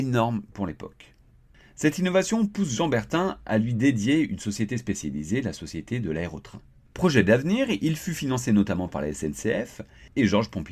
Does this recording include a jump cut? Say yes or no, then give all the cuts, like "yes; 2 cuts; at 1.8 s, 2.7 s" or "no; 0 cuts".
no; 0 cuts